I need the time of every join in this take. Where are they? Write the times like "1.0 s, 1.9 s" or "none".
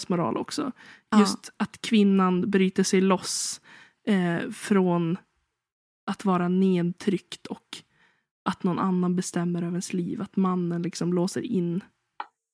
none